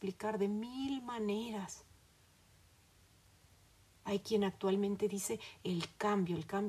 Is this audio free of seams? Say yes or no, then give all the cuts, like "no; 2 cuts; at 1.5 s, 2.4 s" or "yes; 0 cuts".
yes; 0 cuts